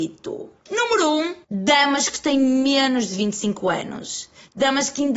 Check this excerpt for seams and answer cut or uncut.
cut